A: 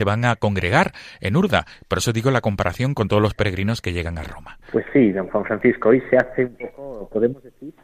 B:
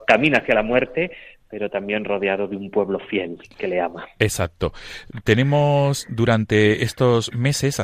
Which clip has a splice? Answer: A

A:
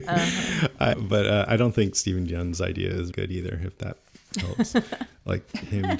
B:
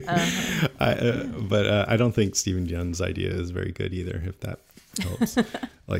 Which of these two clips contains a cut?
A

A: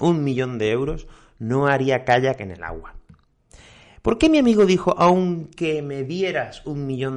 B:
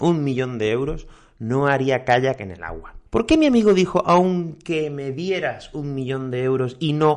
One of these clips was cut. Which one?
B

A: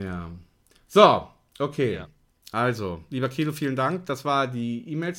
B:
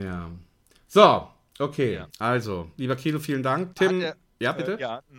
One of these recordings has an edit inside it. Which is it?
B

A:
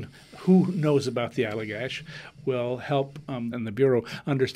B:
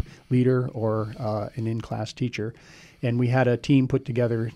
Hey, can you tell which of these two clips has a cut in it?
A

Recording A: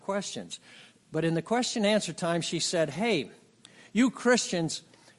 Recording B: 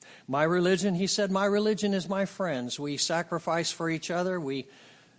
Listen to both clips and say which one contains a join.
A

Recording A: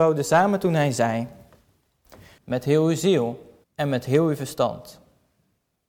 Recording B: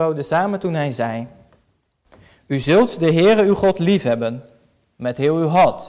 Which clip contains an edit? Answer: A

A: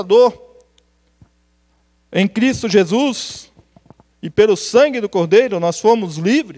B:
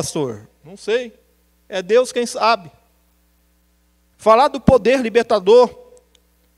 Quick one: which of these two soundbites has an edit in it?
B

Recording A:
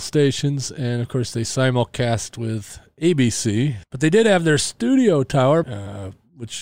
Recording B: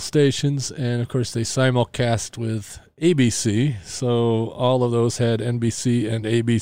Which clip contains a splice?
A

